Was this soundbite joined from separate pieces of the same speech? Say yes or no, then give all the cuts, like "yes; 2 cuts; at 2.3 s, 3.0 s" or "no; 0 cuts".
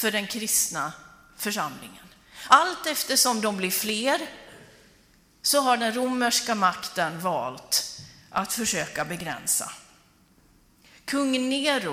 no; 0 cuts